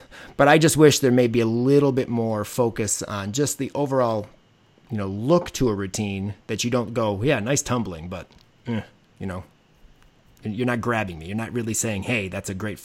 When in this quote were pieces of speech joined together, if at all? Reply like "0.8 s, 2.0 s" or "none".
none

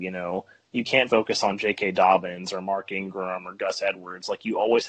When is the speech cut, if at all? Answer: 1.1 s

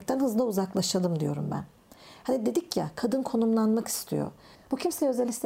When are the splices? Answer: 4.6 s

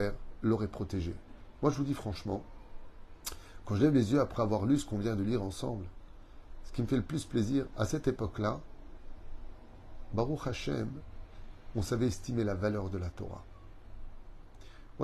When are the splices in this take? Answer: 1.6 s, 7.7 s

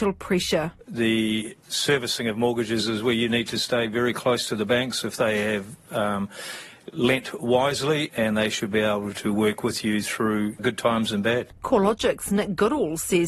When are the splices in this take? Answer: 8.1 s

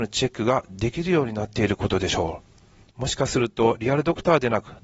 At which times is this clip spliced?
none

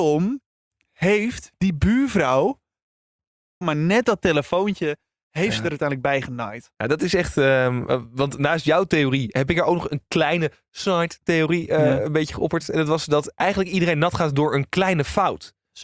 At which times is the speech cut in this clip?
3.6 s

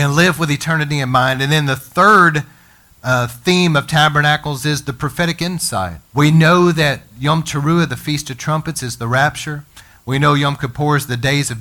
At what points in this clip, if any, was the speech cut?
6.1 s

